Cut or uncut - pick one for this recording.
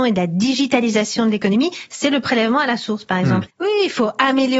cut